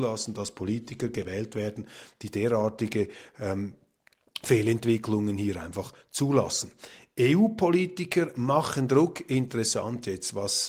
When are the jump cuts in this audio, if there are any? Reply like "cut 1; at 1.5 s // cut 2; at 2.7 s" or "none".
none